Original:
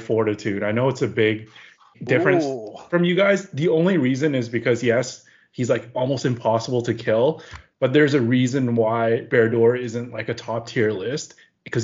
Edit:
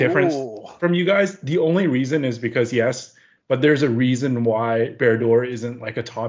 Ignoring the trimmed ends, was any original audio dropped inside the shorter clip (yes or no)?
yes